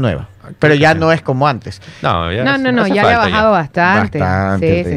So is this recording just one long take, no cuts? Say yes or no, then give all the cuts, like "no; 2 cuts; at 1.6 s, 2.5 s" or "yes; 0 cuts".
yes; 0 cuts